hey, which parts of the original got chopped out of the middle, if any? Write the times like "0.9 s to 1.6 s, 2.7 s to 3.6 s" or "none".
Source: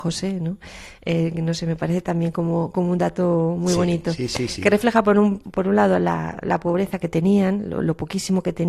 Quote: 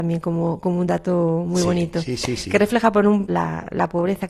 5.4 s to 6.0 s